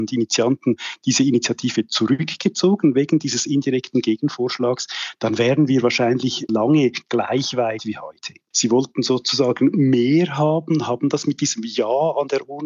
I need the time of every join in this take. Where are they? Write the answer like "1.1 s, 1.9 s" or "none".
6.5 s, 8.5 s